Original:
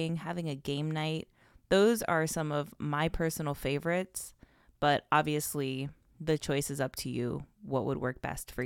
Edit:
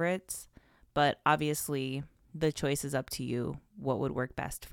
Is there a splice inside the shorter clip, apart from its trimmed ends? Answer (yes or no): no